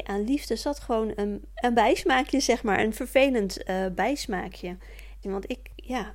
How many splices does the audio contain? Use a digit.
2